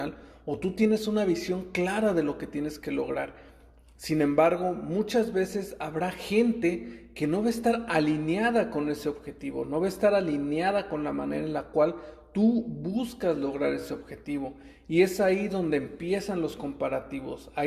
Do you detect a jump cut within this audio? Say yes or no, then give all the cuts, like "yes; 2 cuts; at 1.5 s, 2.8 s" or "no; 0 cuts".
no; 0 cuts